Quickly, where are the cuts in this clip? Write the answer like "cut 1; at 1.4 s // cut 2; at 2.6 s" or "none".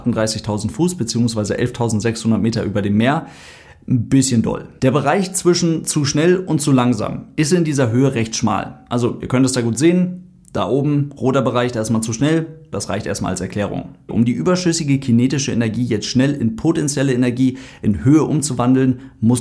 cut 1; at 12.7 s // cut 2; at 14.1 s